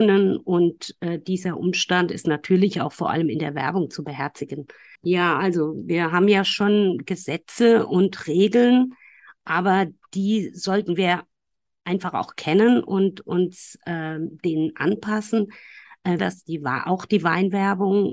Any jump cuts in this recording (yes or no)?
yes